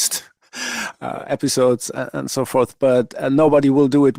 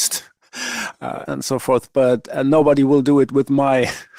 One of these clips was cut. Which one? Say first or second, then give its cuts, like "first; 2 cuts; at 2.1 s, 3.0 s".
second; 1 cut; at 1.2 s